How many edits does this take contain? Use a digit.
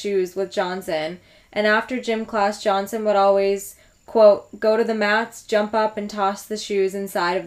0